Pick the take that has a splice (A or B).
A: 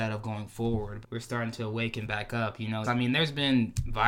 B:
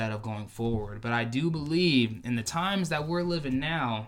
A